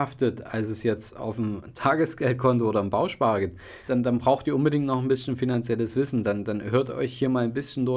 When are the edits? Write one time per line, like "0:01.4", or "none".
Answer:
0:03.9